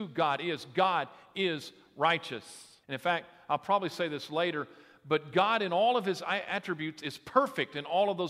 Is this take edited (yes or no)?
yes